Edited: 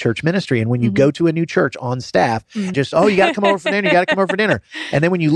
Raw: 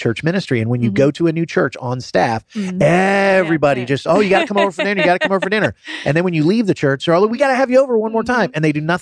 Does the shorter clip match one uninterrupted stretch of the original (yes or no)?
no